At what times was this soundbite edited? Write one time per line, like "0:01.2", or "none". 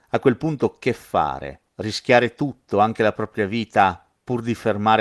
none